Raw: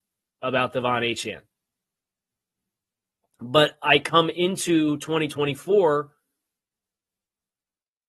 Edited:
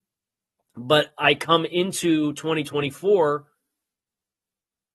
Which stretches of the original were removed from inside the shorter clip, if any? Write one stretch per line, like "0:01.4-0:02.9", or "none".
none